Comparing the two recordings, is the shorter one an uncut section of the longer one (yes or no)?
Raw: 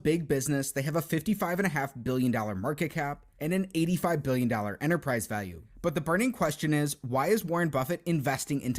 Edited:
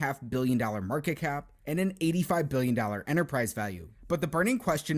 yes